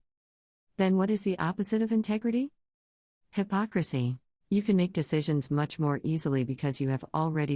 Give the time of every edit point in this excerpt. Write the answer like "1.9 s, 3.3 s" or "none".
4.4 s